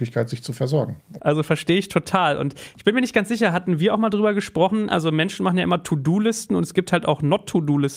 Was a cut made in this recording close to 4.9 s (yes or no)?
yes